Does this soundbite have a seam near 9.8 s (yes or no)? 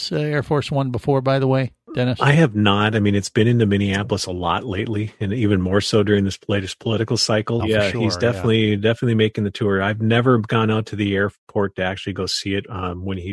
no